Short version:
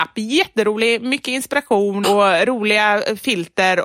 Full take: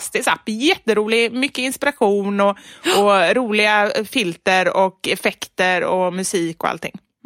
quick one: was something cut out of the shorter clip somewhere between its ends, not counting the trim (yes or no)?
yes